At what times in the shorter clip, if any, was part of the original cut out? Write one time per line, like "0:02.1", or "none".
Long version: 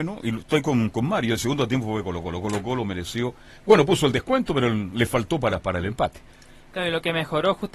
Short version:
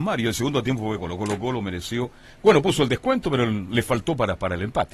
0:01.0